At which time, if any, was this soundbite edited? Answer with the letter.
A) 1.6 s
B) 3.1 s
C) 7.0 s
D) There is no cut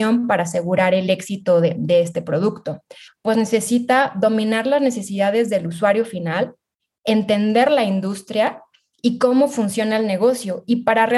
B